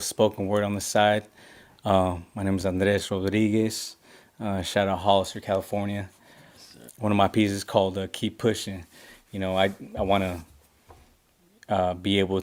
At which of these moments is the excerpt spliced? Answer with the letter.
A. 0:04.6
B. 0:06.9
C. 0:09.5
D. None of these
B